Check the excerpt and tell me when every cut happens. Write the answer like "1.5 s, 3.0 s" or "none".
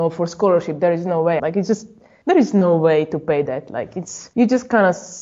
1.4 s